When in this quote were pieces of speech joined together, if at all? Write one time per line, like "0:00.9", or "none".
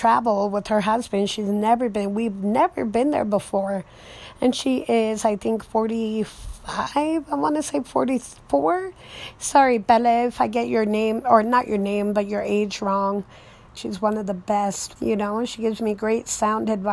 0:13.8
0:15.0